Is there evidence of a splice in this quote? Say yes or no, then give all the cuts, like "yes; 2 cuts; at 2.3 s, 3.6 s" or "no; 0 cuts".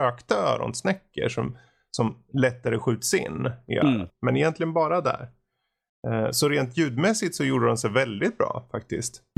yes; 1 cut; at 4.1 s